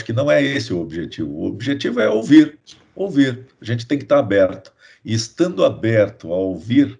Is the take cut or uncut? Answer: uncut